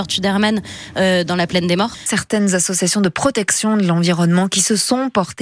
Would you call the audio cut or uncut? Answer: cut